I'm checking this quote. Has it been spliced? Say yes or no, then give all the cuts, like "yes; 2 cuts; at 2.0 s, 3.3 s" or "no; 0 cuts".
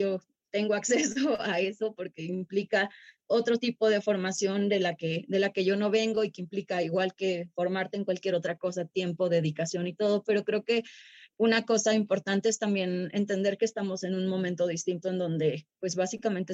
no; 0 cuts